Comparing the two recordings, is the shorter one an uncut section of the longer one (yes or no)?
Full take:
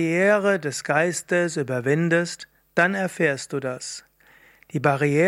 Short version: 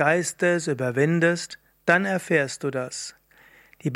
yes